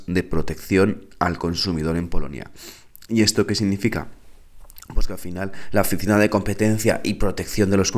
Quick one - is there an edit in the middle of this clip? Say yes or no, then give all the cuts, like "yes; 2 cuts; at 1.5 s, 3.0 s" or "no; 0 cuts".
no; 0 cuts